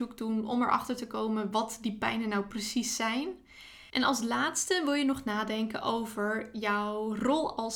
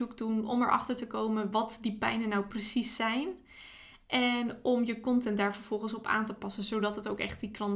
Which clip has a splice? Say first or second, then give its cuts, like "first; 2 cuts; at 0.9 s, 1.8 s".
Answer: first; 1 cut; at 3.9 s